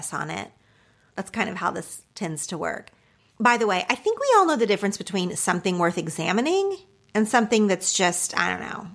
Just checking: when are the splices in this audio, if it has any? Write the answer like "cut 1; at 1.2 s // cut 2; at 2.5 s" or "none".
cut 1; at 1.1 s // cut 2; at 3.3 s